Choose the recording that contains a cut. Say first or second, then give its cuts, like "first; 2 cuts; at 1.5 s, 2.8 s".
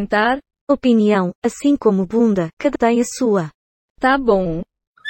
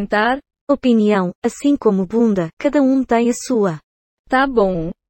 first; 1 cut; at 2.7 s